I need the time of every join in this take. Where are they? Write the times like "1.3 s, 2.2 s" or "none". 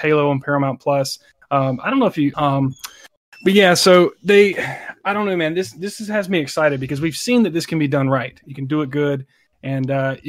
2.3 s, 8.4 s